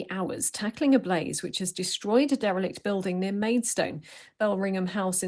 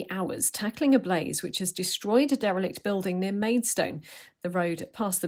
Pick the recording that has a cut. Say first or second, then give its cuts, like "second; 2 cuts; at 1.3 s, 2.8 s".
second; 1 cut; at 4.4 s